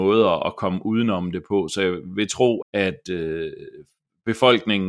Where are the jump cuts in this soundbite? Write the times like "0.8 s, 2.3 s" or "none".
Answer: 2.6 s